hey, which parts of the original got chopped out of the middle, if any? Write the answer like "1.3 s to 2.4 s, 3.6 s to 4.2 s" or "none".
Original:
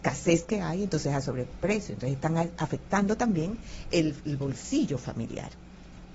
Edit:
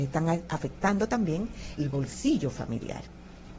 3.8 s to 4.2 s